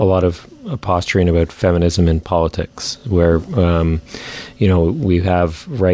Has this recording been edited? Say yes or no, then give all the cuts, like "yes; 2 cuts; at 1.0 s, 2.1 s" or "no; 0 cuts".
no; 0 cuts